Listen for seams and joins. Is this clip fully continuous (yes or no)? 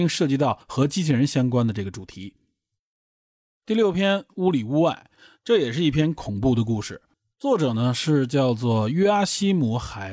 yes